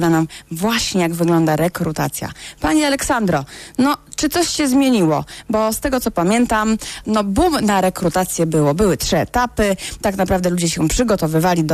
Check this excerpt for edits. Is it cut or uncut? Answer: cut